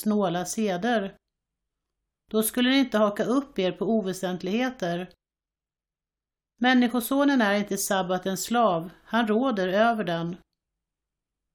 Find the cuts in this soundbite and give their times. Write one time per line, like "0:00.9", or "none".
none